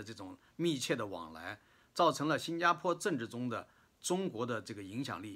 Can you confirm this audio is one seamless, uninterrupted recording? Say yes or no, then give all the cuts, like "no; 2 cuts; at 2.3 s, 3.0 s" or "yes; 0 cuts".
yes; 0 cuts